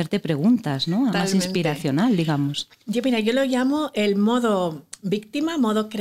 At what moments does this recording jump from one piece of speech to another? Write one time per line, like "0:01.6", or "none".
0:01.1